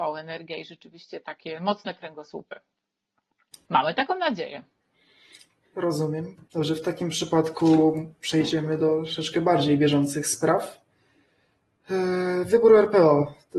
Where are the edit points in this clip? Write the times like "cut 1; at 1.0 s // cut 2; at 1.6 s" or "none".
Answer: cut 1; at 3.6 s // cut 2; at 6.5 s